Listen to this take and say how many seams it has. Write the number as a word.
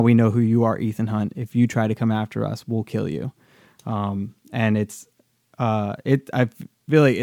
zero